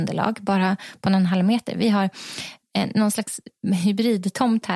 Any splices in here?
no; 0 cuts

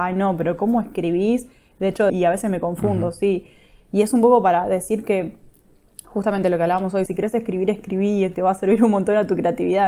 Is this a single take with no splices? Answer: no; 2 cuts; at 2.1 s, 7.1 s

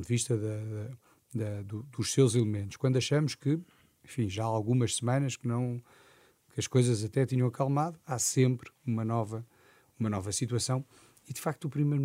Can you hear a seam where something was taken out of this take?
no; 0 cuts

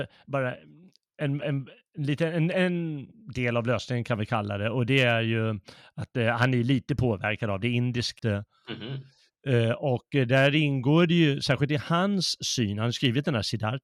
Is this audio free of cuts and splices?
no; 1 cut; at 8.2 s

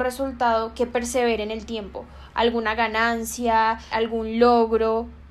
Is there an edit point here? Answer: yes; 1 cut; at 3.9 s

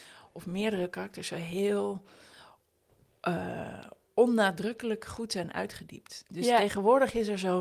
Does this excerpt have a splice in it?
no; 0 cuts

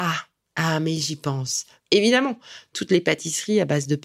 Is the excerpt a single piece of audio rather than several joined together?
no; 1 cut; at 1.8 s

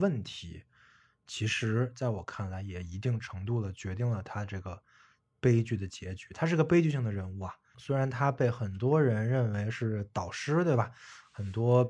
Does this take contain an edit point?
yes; 1 cut; at 7.7 s

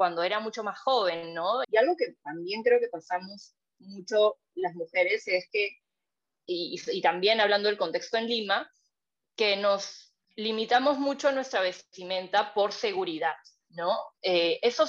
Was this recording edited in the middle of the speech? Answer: yes; 1 cut; at 1.6 s

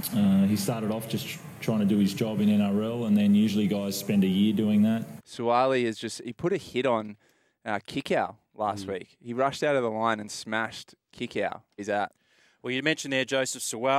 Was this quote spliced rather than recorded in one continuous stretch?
yes; 2 cuts; at 5.2 s, 11.8 s

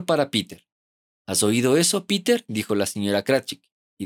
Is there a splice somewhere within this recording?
no; 0 cuts

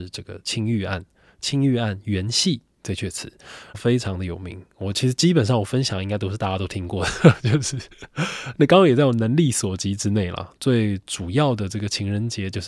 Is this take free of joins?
no; 2 cuts; at 3.7 s, 10.6 s

